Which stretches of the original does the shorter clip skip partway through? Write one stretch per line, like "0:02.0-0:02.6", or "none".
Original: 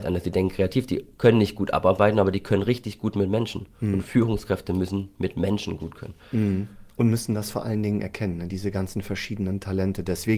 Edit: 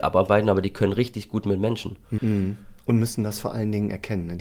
0:03.9-0:06.3